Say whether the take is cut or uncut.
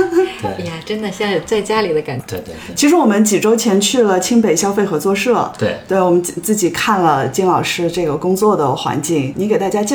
uncut